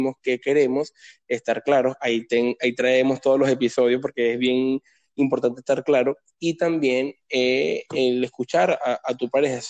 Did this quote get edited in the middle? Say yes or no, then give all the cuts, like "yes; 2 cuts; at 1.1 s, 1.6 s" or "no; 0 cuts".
no; 0 cuts